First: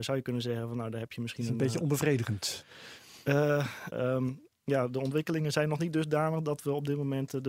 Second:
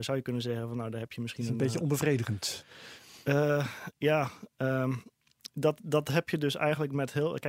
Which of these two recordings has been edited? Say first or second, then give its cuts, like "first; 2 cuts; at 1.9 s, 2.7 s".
first; 1 cut; at 3.9 s